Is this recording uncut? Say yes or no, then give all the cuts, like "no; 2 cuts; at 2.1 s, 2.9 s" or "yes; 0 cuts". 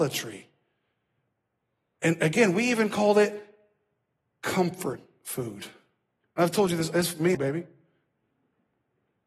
no; 2 cuts; at 6.2 s, 7.3 s